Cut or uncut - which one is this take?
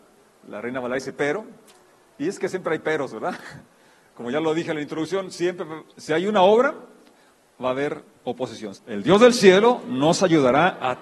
cut